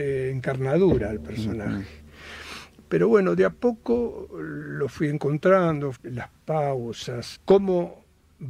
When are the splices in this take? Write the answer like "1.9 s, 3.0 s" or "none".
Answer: 5.9 s, 7.3 s